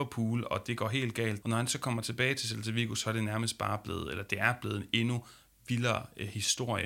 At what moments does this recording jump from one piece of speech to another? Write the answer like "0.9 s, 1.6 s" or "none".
1.4 s